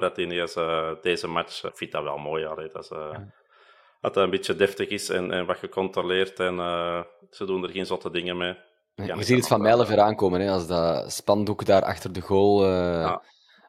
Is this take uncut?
no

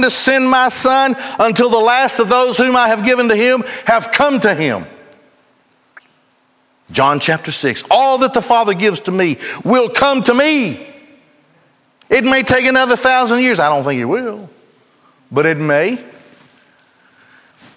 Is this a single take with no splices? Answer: yes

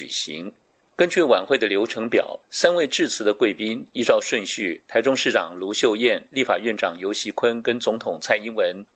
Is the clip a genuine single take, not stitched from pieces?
yes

